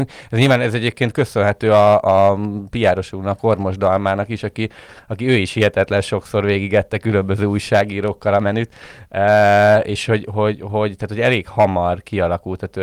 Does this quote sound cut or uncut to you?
cut